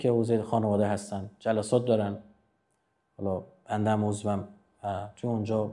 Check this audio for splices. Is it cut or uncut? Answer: uncut